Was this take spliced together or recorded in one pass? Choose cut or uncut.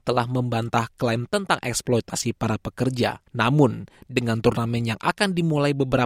cut